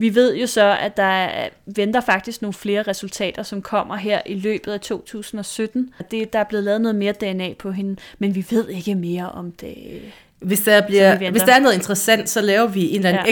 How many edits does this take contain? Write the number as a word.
one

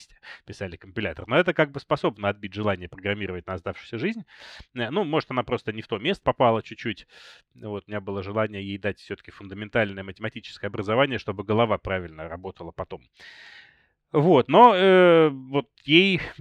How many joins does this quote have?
one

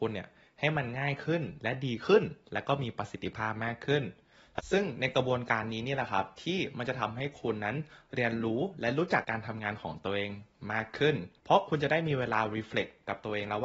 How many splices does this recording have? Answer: two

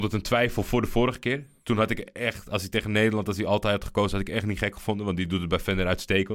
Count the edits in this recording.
zero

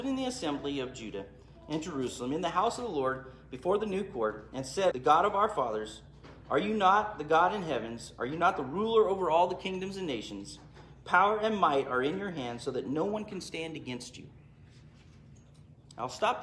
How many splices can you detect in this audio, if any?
one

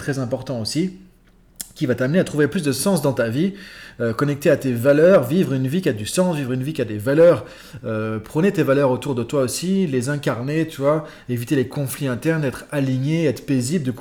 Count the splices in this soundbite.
zero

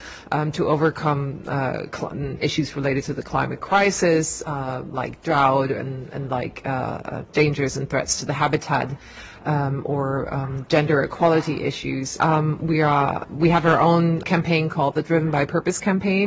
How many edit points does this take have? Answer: two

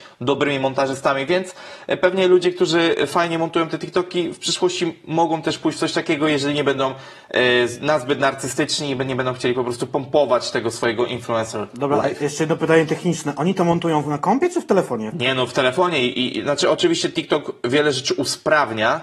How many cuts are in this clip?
one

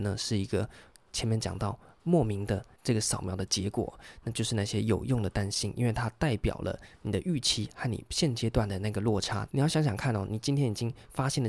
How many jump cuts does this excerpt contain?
two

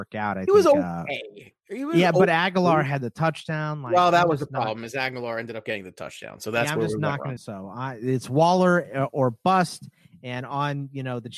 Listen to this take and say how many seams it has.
one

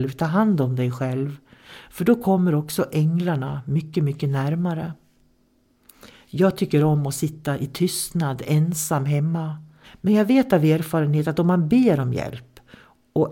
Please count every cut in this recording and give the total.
one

